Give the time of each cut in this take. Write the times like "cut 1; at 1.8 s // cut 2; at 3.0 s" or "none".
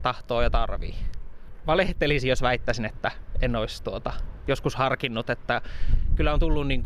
cut 1; at 1.6 s